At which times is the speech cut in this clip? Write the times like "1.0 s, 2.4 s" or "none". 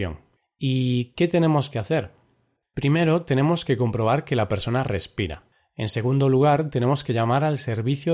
none